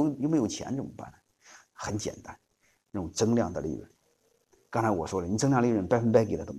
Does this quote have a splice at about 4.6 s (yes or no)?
no